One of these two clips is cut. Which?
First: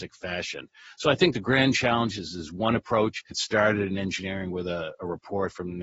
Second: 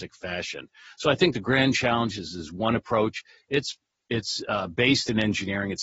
first; 1 cut; at 3.3 s

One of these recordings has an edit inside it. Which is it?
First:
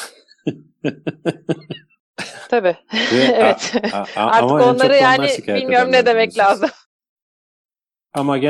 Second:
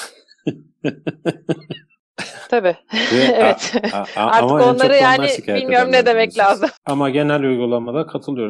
second; 1 cut; at 6.8 s

